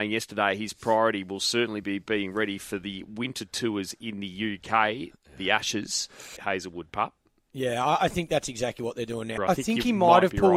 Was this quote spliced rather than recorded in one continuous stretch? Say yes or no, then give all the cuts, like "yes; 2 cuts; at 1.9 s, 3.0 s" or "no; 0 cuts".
yes; 2 cuts; at 6.4 s, 9.4 s